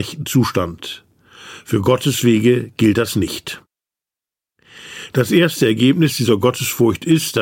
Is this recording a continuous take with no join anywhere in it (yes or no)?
yes